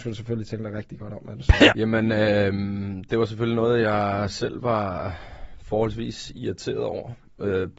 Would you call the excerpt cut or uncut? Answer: cut